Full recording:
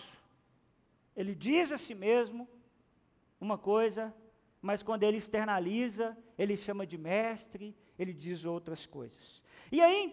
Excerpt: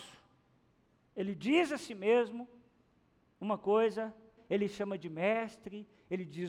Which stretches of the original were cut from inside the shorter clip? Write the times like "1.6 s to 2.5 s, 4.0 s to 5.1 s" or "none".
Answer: 4.4 s to 6.3 s